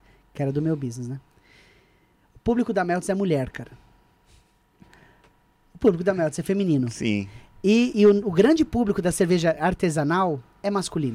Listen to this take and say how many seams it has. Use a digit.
1